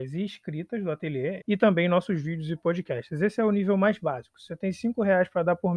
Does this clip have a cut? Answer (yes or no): yes